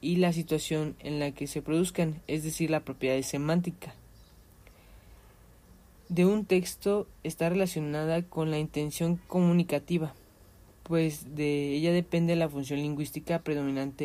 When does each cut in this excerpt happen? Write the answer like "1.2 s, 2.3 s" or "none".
none

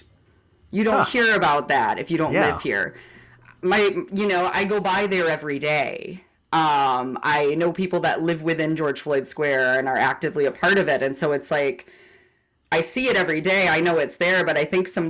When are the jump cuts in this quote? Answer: 4.5 s

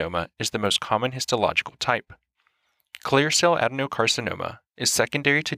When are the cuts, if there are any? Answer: none

